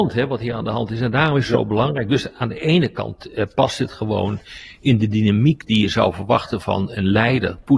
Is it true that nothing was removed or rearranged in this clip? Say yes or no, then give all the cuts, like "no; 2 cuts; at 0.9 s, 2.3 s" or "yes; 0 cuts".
yes; 0 cuts